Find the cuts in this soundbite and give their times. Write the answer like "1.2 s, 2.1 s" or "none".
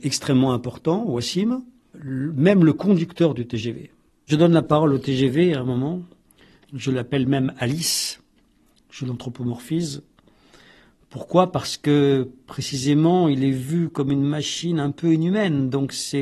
1.9 s

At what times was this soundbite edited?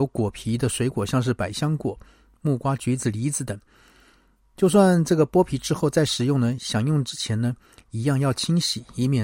none

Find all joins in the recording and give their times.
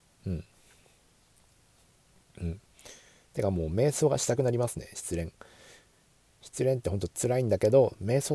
2.2 s

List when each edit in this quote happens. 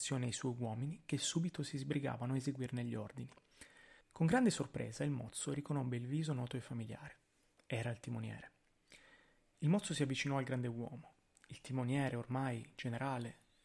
4.0 s

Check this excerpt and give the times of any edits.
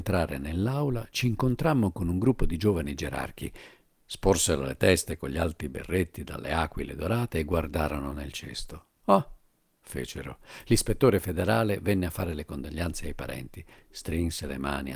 9.0 s

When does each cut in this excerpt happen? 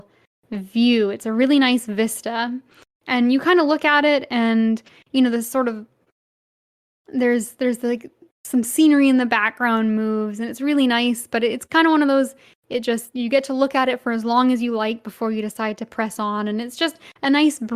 none

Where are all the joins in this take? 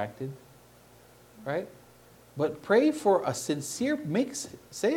none

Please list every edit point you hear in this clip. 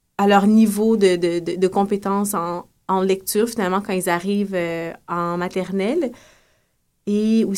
none

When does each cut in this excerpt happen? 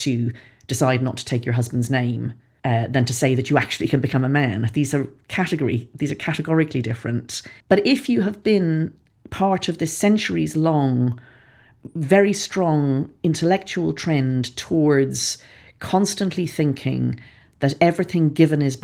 7.6 s

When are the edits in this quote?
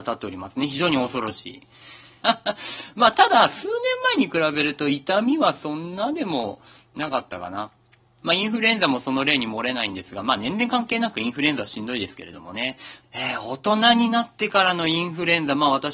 2.2 s, 8.2 s, 13.0 s

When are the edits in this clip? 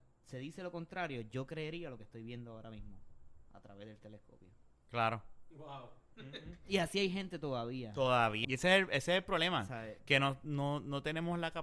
8.4 s

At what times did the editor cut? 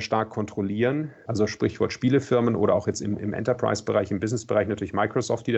1.3 s

